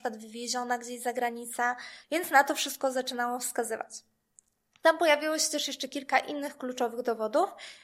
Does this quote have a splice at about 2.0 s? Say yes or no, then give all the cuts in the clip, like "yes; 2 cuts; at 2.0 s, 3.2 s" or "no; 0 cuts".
yes; 1 cut; at 2.0 s